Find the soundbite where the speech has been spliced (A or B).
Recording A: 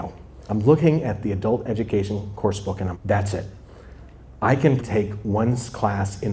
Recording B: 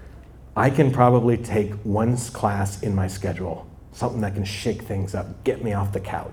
A